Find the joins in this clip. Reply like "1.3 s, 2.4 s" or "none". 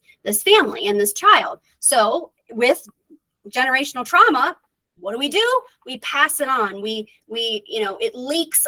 none

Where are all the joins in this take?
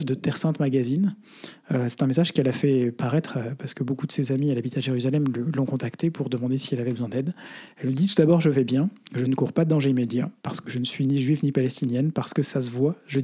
none

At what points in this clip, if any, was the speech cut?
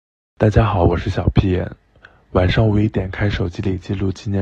none

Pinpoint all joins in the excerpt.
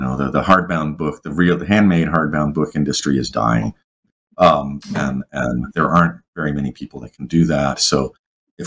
none

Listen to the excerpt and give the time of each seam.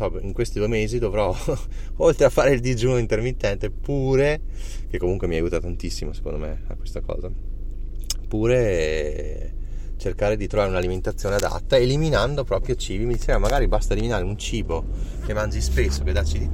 none

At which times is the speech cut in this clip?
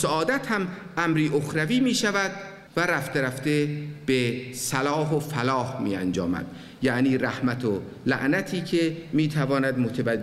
2.7 s

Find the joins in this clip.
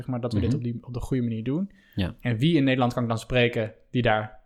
none

